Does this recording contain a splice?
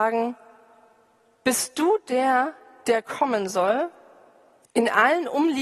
yes; 1 cut; at 4.6 s

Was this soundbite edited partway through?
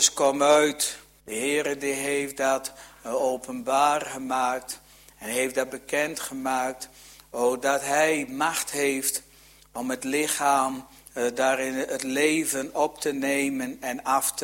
yes; 1 cut; at 1.2 s

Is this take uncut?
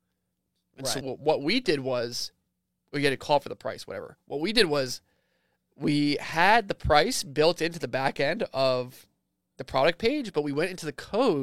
no; 1 cut; at 1.0 s

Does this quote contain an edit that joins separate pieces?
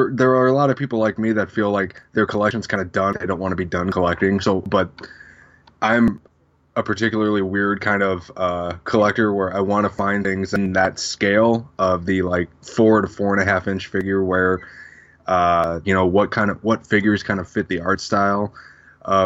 yes; 1 cut; at 15.8 s

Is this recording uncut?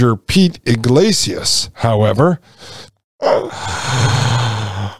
no; 1 cut; at 2.9 s

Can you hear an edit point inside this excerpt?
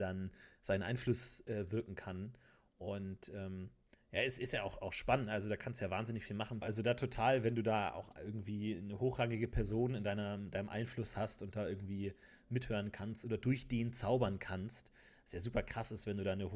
yes; 1 cut; at 6.6 s

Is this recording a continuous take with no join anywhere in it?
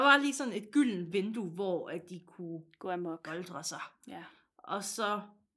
yes; 0 cuts

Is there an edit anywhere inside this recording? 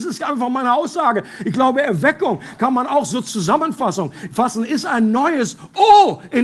no; 0 cuts

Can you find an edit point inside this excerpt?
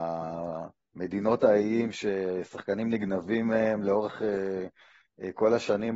no; 0 cuts

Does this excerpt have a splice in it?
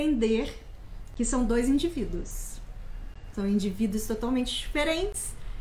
no; 0 cuts

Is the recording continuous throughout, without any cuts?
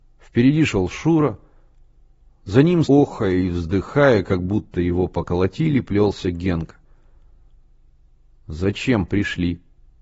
no; 1 cut; at 2.8 s

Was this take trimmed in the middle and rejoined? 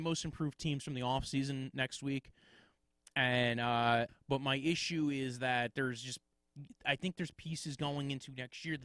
yes; 1 cut; at 4.1 s

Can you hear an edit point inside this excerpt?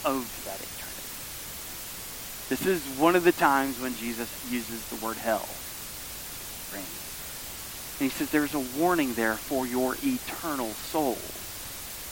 yes; 2 cuts; at 4.4 s, 6.7 s

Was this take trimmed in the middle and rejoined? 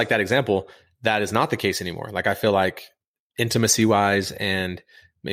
no; 0 cuts

